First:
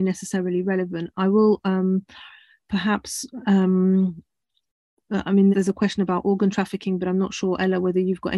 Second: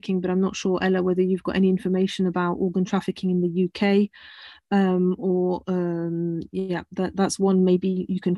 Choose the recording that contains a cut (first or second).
first